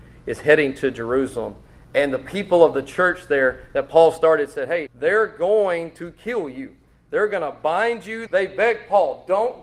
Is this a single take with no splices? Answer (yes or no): no